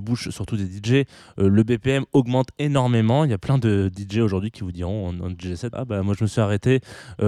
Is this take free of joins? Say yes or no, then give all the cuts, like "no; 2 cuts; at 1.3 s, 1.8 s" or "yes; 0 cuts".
no; 1 cut; at 5.7 s